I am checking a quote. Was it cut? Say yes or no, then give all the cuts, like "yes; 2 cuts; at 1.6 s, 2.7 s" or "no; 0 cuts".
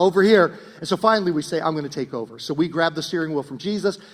no; 0 cuts